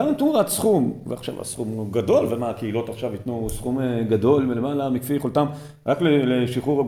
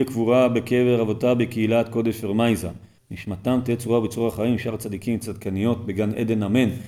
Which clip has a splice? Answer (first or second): second